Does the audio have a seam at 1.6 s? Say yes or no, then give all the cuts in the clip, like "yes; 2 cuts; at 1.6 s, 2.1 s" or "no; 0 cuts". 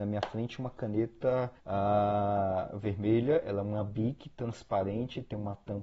yes; 1 cut; at 1.6 s